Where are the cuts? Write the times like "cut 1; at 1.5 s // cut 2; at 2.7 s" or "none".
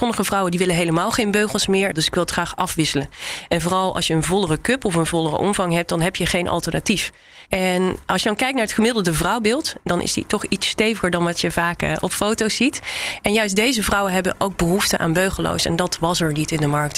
cut 1; at 1.9 s // cut 2; at 7.5 s